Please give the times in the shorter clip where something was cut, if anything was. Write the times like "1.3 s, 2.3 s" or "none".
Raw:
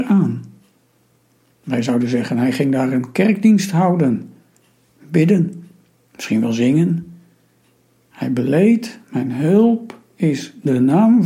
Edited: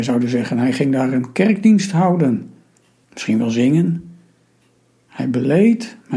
3.0 s